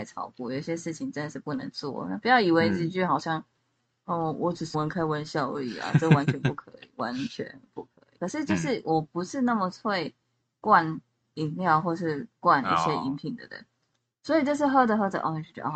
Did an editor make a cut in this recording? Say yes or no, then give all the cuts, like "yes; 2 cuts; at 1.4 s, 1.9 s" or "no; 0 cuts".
yes; 2 cuts; at 4.7 s, 8.2 s